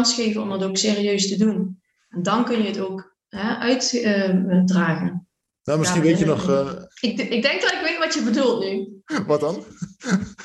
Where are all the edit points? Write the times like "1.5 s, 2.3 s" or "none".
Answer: 6.9 s